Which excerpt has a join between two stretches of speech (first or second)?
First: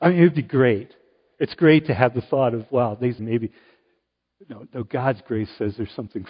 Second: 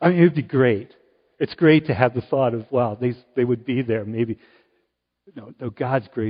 first